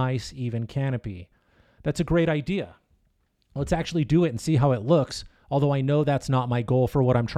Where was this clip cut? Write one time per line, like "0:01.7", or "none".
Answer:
none